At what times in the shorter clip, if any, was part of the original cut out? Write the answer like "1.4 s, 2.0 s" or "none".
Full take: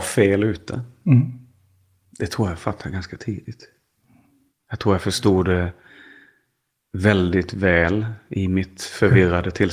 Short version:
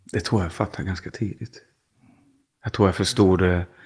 none